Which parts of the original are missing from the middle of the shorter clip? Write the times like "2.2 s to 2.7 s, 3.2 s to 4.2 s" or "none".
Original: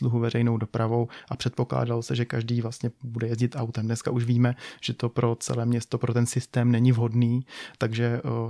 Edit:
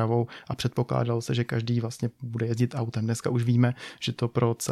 none